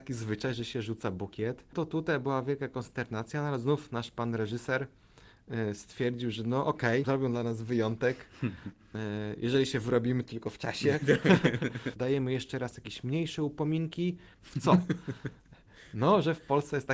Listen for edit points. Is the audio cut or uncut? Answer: cut